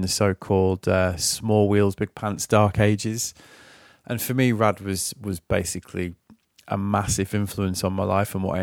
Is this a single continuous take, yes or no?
yes